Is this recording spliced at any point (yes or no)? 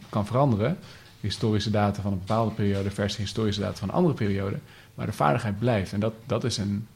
no